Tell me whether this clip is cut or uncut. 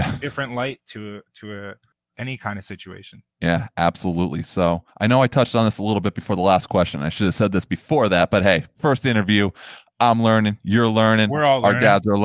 cut